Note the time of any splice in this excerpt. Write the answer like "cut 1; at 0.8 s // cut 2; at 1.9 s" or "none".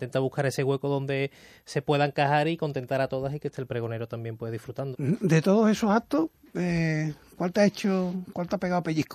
cut 1; at 4.9 s